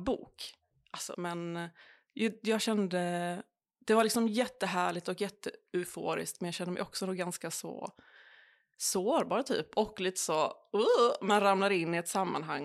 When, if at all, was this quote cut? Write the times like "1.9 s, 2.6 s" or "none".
1.1 s